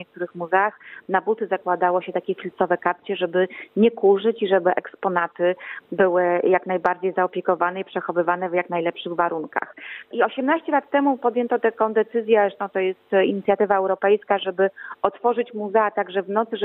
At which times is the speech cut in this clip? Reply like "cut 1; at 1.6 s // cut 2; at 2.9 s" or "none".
cut 1; at 10.1 s